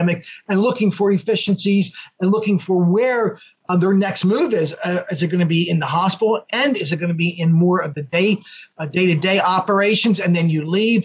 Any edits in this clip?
no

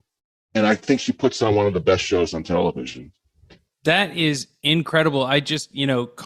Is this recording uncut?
yes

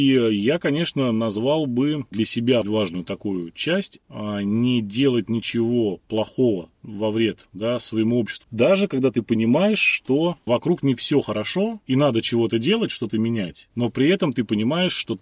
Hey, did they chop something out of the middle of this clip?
yes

